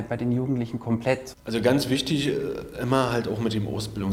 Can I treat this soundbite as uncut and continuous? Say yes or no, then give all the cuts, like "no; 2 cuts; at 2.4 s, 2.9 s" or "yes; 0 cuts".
no; 1 cut; at 1.3 s